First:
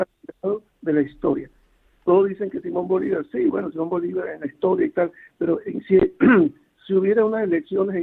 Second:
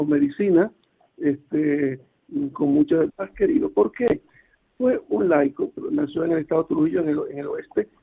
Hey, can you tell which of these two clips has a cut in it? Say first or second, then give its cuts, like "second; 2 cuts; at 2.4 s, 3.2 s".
second; 2 cuts; at 3.1 s, 5.8 s